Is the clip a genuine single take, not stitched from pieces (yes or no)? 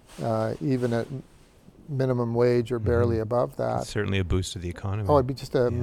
yes